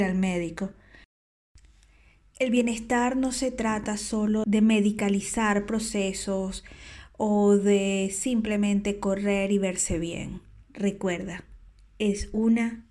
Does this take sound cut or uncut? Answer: cut